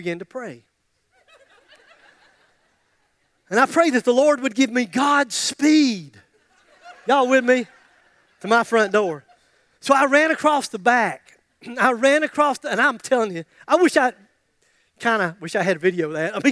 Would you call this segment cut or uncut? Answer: uncut